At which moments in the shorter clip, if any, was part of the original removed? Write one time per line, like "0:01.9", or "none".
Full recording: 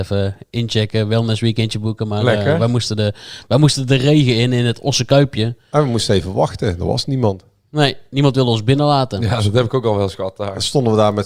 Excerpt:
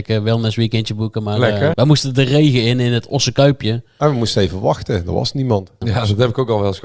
0:01.7
0:05.8